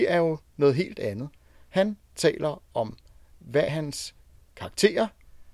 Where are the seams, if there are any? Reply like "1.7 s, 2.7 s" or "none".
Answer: 3.7 s

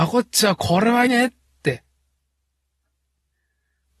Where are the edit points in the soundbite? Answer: 1.1 s

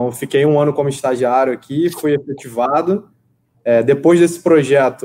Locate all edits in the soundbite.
3.5 s

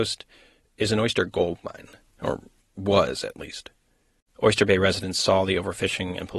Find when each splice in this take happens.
4.3 s

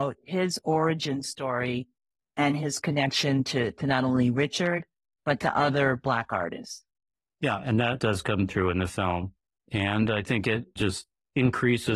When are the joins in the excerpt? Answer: 10.8 s

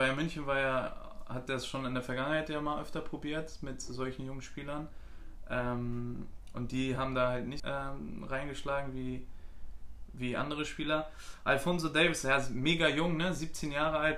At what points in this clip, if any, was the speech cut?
7.6 s

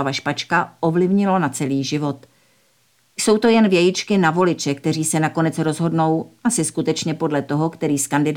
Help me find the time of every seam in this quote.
3.0 s

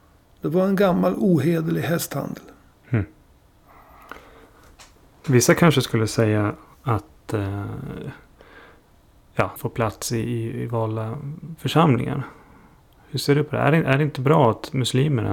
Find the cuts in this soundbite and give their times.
9.6 s

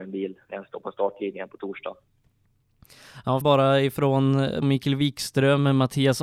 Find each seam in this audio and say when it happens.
3.4 s, 4.6 s

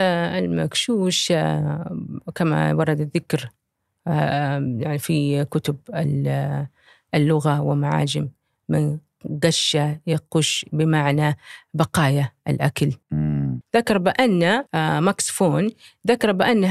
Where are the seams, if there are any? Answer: 13.6 s, 14.7 s

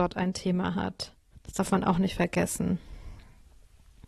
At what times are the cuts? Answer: 1.3 s

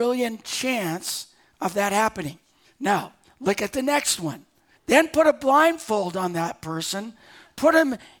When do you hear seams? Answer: 2.6 s, 4.7 s

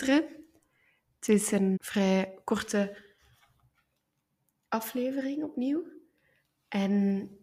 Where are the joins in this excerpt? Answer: 1.8 s

